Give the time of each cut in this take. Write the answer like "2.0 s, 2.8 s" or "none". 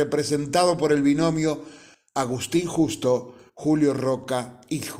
none